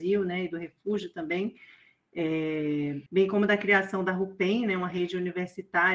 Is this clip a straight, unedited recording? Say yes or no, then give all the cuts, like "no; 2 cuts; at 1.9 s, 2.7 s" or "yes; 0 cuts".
no; 1 cut; at 3.1 s